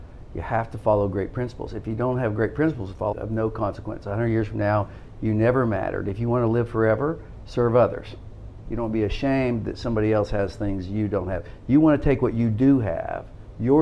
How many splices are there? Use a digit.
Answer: 2